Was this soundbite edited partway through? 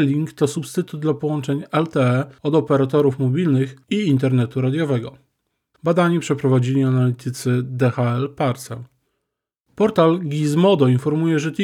yes; 1 cut; at 5.7 s

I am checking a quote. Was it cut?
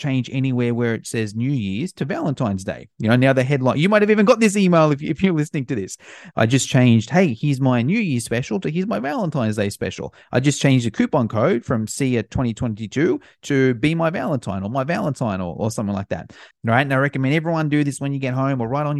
yes; 2 cuts; at 6.3 s, 16.5 s

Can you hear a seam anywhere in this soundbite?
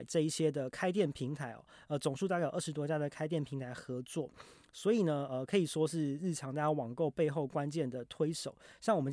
no; 0 cuts

